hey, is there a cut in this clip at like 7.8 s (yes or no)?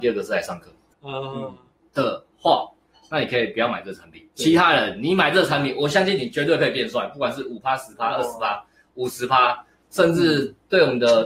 no